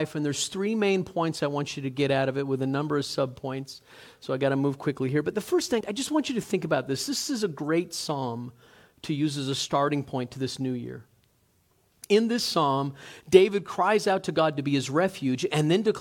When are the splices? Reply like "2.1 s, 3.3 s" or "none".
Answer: 5.8 s